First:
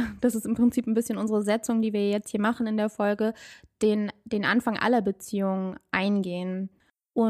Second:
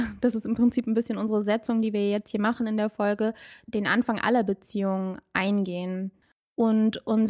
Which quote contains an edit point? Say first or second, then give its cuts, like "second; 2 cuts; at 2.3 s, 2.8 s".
second; 1 cut; at 3.6 s